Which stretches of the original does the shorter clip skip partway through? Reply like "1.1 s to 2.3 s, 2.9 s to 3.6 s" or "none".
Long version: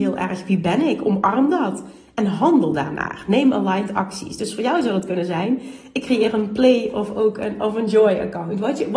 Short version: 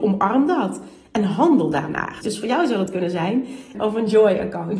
3.2 s to 4.4 s, 5.9 s to 7.6 s